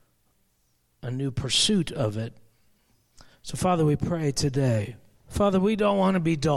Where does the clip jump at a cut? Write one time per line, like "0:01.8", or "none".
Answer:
0:05.1